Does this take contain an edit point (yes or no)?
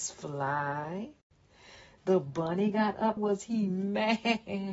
yes